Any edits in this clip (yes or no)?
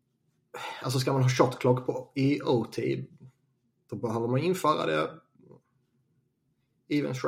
no